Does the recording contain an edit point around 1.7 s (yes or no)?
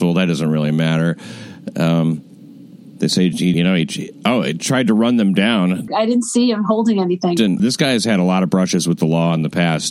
no